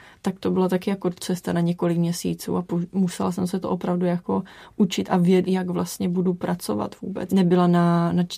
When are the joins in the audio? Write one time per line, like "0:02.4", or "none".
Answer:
0:05.4
0:07.3